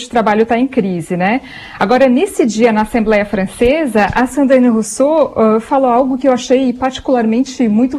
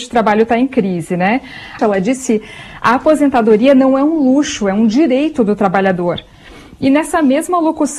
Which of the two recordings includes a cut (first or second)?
second